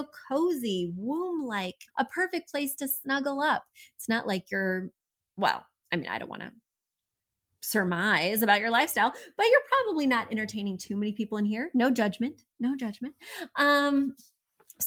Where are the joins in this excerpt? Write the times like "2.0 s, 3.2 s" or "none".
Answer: 1.9 s